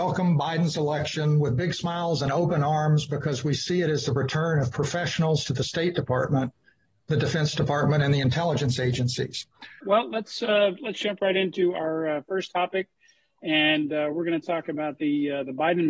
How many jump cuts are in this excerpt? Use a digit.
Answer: 1